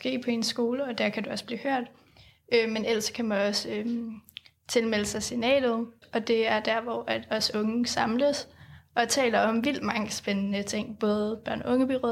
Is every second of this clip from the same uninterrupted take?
no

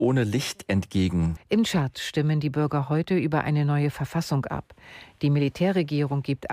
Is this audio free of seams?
no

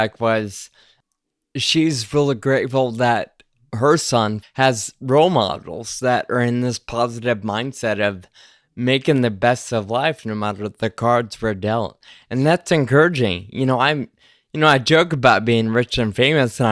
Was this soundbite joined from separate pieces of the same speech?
yes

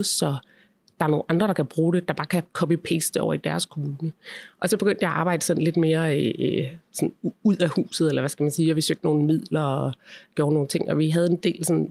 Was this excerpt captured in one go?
yes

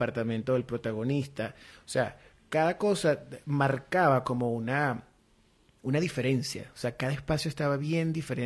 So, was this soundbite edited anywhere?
no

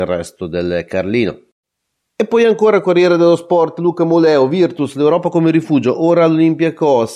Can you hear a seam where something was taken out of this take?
no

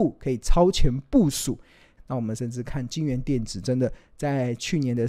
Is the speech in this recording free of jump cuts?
no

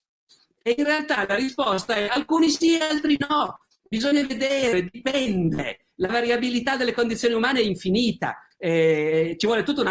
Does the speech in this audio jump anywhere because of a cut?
yes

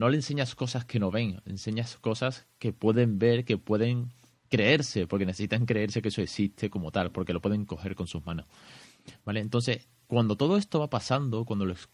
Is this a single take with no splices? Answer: yes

